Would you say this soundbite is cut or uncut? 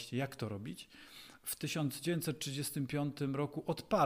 uncut